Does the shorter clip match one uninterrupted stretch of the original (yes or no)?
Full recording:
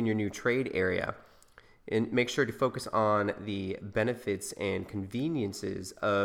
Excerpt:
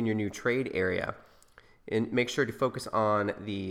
yes